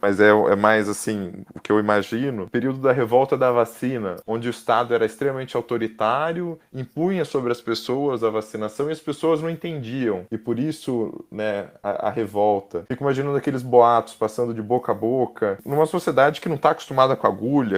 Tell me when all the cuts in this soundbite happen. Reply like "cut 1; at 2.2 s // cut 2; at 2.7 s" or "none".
none